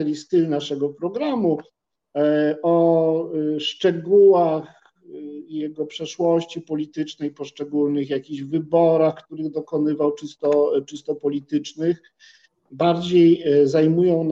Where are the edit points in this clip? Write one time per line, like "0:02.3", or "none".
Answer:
none